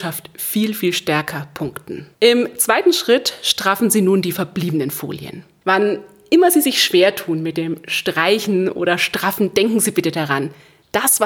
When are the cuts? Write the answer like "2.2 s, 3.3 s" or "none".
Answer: 2.1 s, 5.6 s